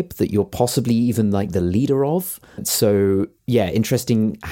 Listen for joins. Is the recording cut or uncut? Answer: uncut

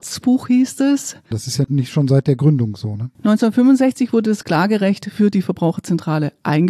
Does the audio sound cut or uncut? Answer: cut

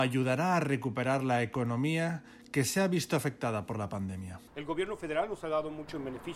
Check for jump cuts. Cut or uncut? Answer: cut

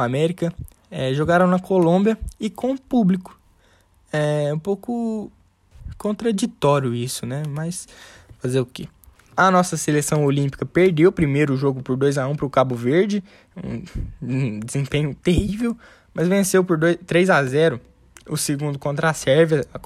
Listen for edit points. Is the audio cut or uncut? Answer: uncut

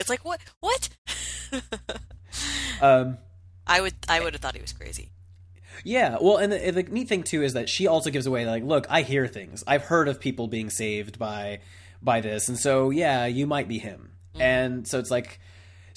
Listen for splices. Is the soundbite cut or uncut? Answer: uncut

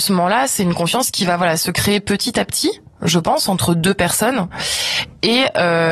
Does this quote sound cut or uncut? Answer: uncut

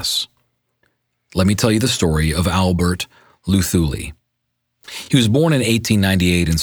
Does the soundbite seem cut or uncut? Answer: uncut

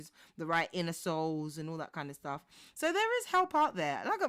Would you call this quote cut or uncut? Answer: uncut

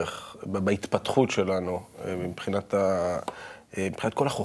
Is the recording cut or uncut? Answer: uncut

